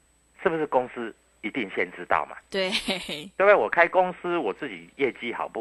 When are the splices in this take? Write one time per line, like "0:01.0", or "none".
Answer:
none